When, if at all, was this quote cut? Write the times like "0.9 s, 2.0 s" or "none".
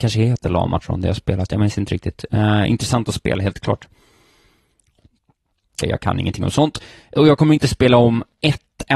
5.8 s